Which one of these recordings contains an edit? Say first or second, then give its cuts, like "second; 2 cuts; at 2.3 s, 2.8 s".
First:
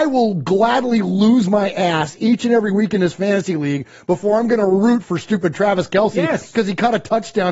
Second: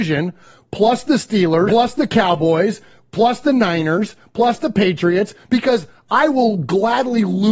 second; 1 cut; at 1.7 s